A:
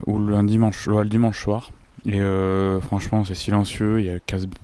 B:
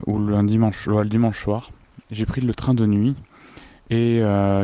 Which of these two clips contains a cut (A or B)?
A